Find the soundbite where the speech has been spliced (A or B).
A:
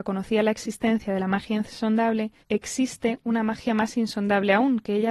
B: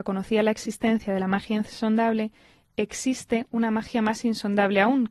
A